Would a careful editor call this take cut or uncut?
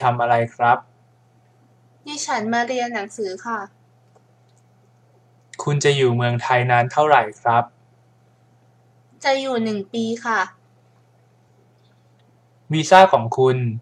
uncut